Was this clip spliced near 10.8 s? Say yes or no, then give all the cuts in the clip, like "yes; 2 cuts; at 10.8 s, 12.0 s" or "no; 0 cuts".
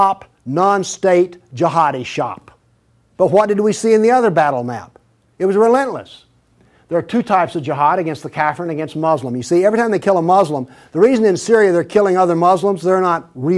no; 1 cut; at 3.1 s